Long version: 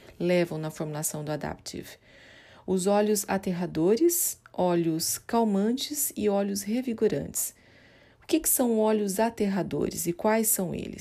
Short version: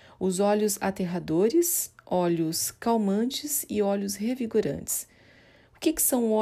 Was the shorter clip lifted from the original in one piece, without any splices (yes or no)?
yes